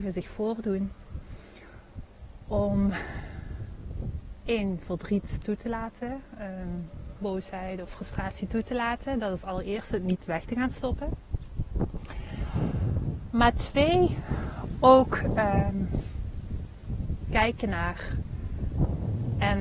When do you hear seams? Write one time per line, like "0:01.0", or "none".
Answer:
none